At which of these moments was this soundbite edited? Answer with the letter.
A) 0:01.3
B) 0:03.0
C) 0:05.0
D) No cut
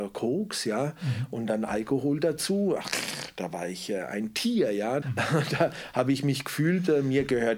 C